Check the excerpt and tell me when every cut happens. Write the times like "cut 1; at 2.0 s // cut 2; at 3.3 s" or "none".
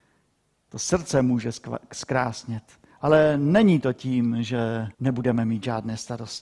cut 1; at 2.9 s // cut 2; at 4.9 s